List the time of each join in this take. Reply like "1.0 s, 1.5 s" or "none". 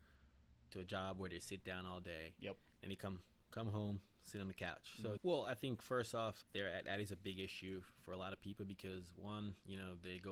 5.2 s, 6.4 s